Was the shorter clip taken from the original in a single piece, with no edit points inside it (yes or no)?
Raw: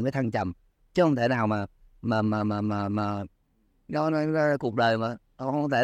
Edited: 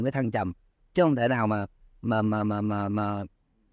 yes